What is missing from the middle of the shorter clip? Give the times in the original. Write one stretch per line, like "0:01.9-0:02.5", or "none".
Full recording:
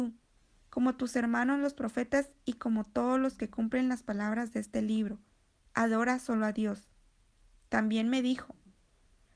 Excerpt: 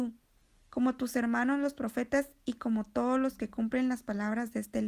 none